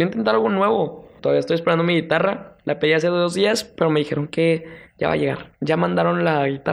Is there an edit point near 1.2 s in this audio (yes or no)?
yes